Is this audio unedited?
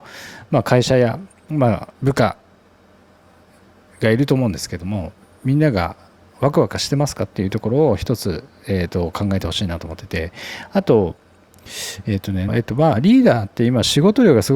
no; 2 cuts; at 1.9 s, 12.5 s

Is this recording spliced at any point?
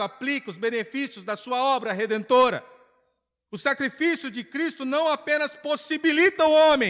yes; 1 cut; at 3.5 s

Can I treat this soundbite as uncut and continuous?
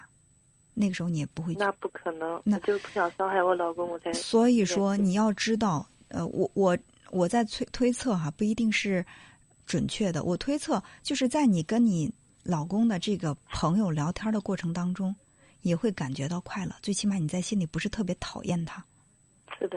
yes; 0 cuts

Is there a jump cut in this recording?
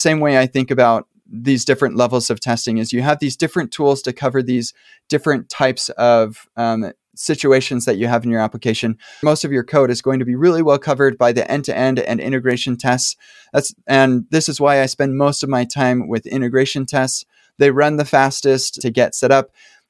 yes; 1 cut; at 18.8 s

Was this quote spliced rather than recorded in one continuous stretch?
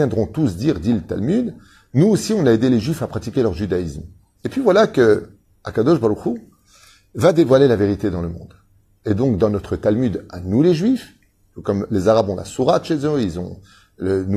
yes; 1 cut; at 4.4 s

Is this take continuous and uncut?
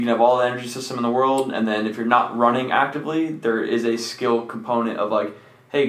yes; 0 cuts

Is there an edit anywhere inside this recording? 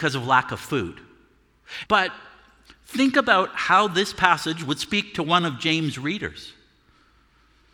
yes; 1 cut; at 1.8 s

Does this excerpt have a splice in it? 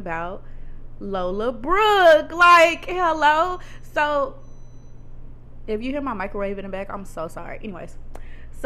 no; 0 cuts

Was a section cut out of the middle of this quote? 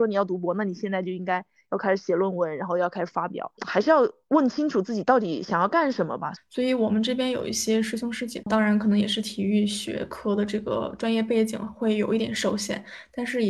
yes; 3 cuts; at 3.6 s, 6.4 s, 8.4 s

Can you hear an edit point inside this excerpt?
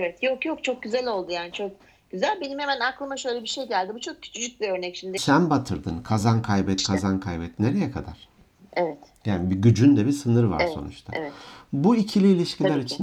yes; 1 cut; at 5.2 s

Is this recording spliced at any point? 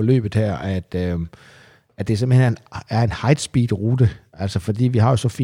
no; 0 cuts

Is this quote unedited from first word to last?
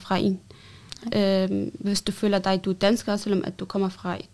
yes; 0 cuts

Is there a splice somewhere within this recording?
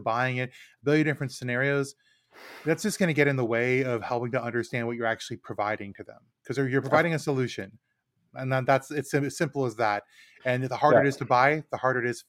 no; 0 cuts

